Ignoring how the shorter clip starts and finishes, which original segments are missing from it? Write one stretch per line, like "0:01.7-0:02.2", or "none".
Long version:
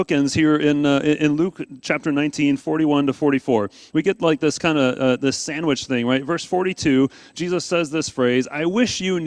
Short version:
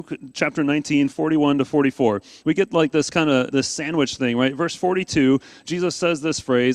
0:05.0-0:05.2